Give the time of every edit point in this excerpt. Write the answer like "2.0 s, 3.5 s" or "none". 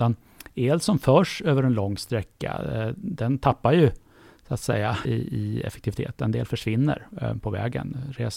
5.1 s